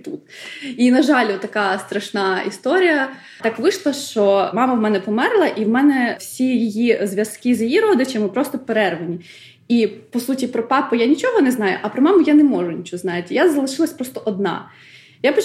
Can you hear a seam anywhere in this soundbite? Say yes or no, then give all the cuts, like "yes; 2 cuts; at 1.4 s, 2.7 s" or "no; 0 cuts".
yes; 1 cut; at 3.4 s